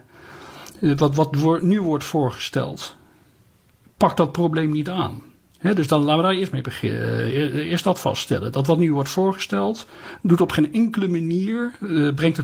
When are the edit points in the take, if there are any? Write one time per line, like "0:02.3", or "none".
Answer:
none

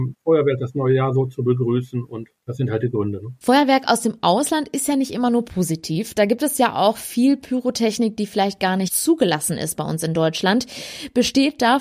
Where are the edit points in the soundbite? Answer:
none

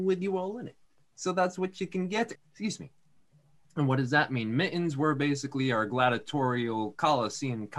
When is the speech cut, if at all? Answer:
0:02.4

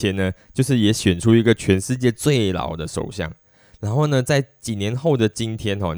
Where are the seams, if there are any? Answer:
none

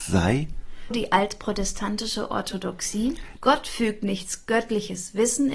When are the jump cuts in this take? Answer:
0:00.9
0:03.4

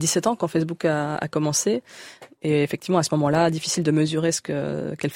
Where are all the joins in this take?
none

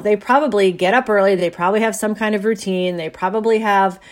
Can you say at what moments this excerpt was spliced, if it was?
none

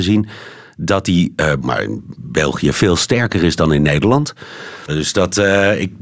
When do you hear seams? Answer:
0:01.6
0:04.9

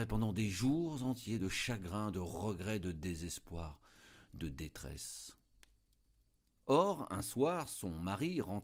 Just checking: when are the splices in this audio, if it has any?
none

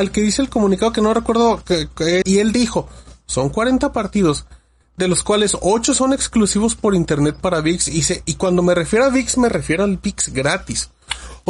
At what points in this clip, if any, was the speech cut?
0:02.2

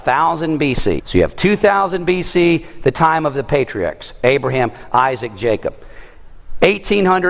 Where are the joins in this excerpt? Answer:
0:01.0

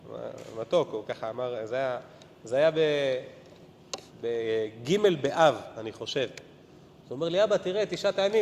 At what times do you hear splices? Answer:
none

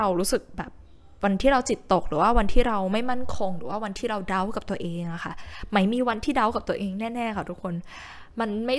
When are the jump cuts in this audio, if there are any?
none

